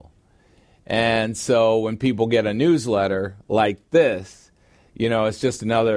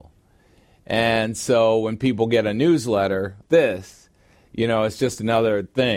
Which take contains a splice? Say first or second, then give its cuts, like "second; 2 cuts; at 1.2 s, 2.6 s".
second; 1 cut; at 3.4 s